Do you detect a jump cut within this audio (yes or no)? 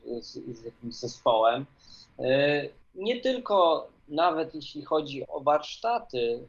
yes